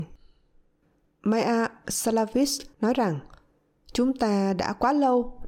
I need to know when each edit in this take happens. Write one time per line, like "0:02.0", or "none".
0:02.7